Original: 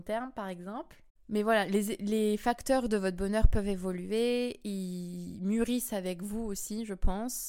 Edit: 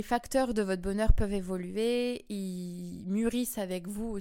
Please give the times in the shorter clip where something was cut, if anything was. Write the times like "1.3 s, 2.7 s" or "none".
none